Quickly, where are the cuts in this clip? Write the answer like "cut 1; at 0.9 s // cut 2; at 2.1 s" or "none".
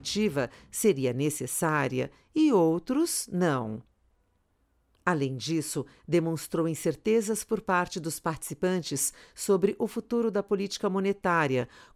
cut 1; at 5.0 s